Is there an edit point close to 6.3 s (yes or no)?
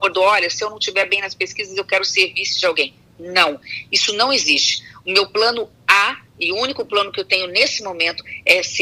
yes